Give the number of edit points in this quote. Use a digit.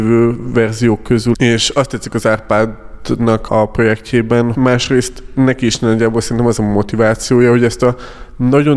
3